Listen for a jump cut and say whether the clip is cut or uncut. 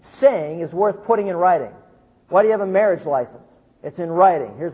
uncut